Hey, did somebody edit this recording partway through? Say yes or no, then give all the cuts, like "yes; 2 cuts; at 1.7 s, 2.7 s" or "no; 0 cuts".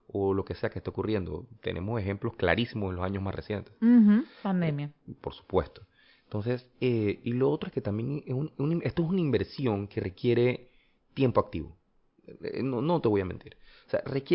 no; 0 cuts